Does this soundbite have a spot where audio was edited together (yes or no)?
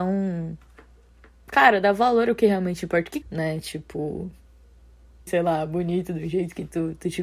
yes